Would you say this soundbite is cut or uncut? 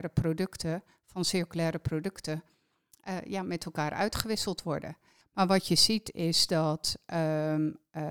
cut